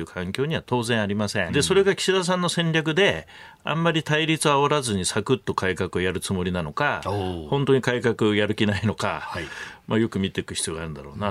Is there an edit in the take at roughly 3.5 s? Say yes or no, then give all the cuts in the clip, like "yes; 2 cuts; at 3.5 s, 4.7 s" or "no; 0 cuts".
no; 1 cut; at 1.5 s